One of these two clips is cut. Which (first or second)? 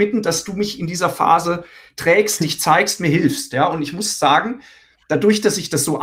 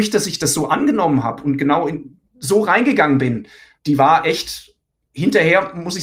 second